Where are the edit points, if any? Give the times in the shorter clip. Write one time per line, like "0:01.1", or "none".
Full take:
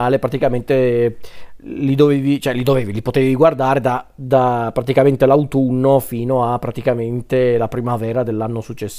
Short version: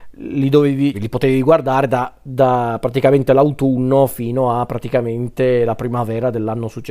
0:00.9